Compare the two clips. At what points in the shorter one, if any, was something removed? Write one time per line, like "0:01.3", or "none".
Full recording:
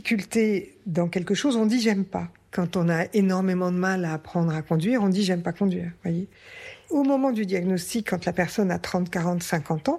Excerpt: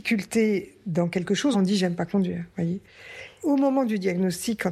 0:01.5